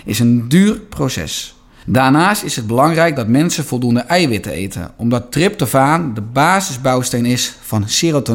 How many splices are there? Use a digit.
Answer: 1